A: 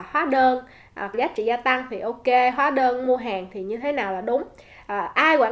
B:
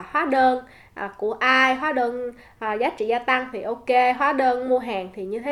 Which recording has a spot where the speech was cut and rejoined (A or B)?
A